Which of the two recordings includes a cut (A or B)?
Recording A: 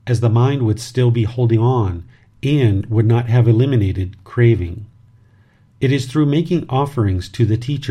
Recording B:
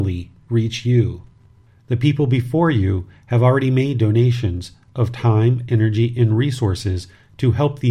B